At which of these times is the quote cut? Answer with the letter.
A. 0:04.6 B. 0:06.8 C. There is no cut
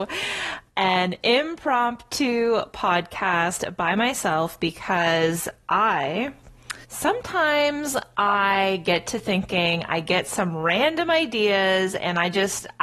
B